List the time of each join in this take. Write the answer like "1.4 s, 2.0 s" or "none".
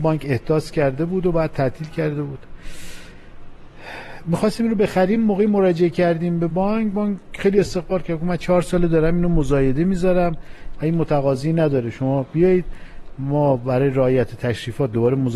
none